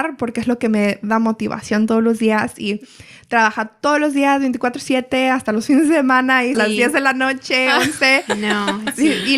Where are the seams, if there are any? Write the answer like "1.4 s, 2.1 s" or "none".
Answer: 6.5 s